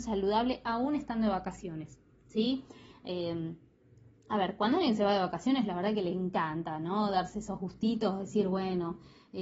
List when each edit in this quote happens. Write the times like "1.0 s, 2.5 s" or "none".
none